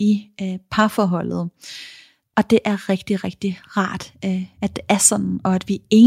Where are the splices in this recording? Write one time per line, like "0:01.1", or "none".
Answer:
0:02.2